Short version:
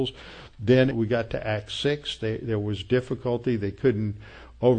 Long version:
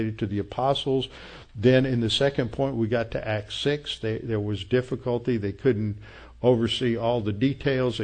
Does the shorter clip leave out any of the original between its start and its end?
yes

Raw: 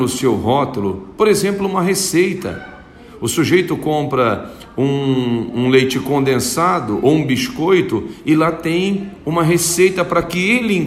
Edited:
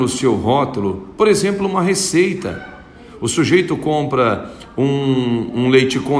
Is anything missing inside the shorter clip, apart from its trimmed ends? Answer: no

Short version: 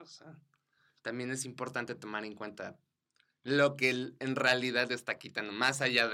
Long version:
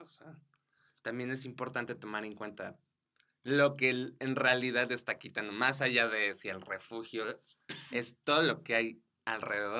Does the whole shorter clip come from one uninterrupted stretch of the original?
yes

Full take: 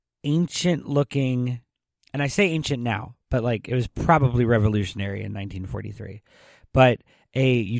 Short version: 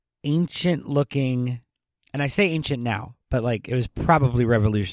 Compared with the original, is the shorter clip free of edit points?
yes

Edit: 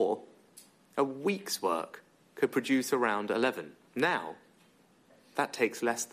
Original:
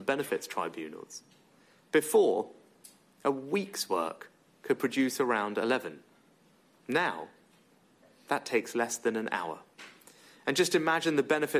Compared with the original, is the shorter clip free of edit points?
no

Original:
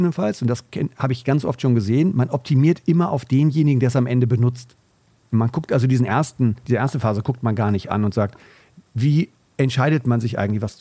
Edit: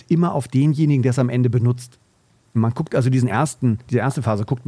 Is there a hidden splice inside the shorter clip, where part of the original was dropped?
no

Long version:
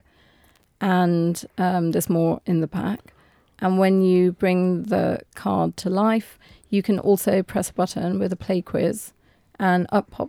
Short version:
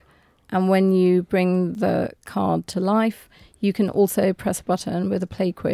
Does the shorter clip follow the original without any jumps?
yes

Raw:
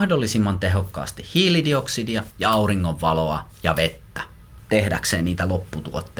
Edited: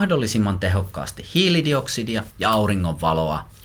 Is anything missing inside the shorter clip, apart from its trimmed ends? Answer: no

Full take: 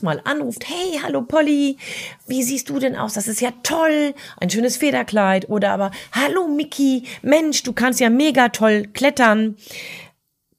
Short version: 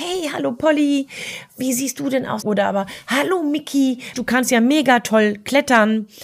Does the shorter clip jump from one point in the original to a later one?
yes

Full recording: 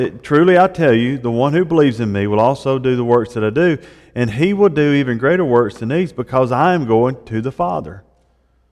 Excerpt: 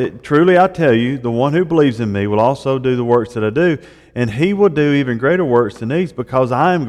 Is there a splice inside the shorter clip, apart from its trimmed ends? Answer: no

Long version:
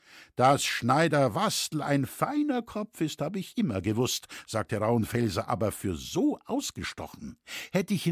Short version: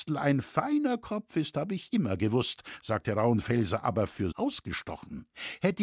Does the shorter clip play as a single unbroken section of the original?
no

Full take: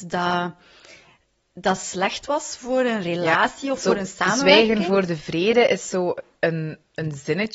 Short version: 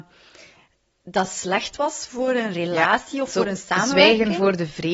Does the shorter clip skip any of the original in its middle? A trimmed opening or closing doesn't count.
no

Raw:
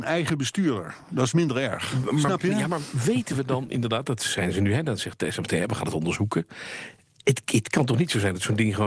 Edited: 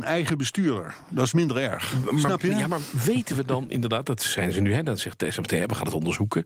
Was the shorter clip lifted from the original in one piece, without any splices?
yes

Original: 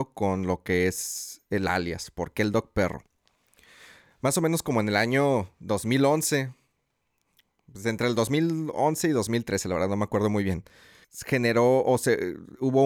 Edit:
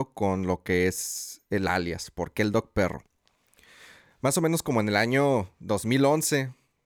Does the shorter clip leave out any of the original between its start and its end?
no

